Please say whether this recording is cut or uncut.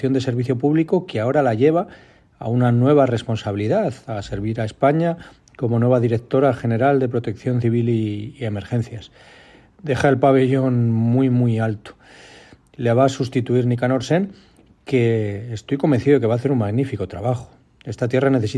uncut